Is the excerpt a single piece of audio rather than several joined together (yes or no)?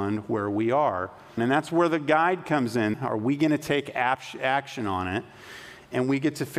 no